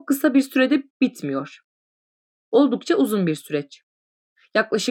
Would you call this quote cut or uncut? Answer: uncut